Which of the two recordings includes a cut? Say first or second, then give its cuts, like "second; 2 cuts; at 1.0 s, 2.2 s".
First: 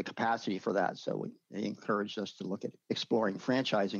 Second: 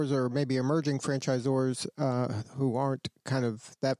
first; 1 cut; at 2.8 s